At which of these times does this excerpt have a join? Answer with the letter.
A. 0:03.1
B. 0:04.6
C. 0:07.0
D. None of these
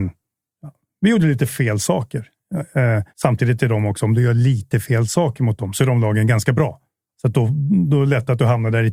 A